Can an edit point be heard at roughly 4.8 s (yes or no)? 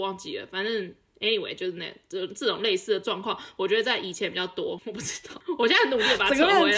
yes